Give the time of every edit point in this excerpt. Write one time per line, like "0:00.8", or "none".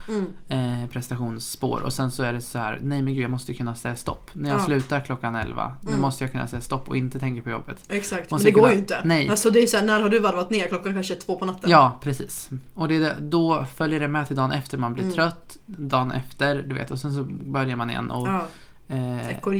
none

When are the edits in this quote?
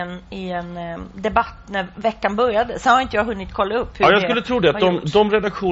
none

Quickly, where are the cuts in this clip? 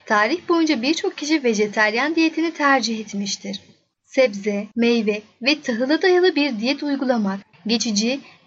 none

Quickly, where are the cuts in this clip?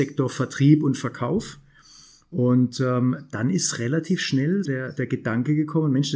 0:04.6

